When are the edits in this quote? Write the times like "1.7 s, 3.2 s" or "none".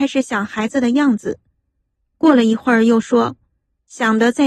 none